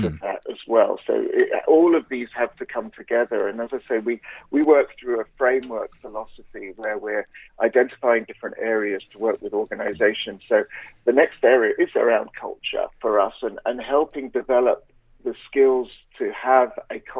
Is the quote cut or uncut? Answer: cut